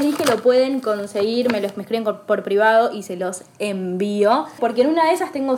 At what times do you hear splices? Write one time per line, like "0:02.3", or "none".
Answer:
0:04.6

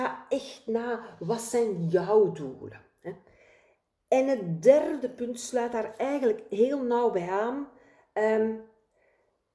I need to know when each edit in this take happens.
none

